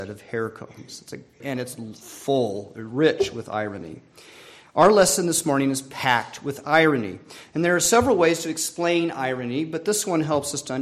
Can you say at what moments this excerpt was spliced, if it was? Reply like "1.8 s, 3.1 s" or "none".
1.4 s